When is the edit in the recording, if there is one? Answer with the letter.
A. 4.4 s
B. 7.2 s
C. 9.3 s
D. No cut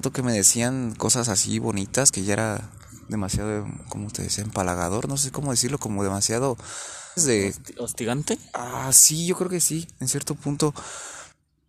B